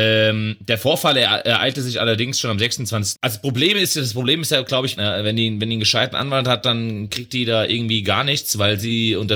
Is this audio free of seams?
no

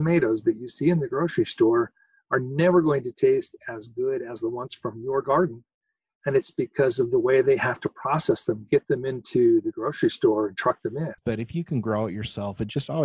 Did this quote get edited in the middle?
yes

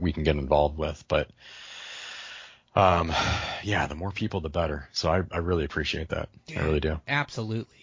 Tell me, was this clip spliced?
no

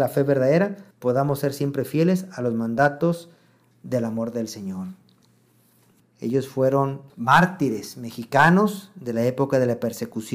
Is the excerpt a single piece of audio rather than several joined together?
no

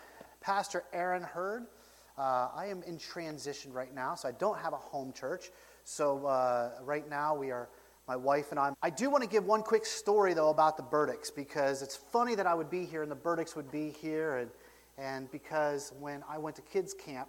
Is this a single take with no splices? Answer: no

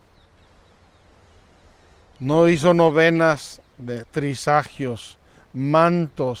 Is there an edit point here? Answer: yes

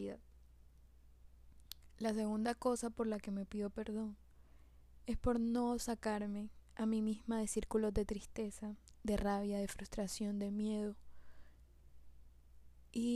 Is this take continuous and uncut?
yes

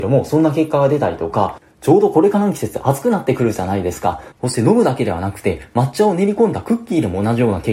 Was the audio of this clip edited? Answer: yes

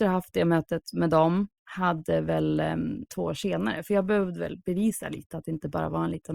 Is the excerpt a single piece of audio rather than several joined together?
no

